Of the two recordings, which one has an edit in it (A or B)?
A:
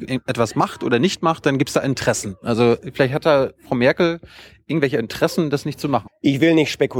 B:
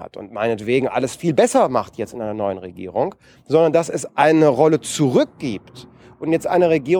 A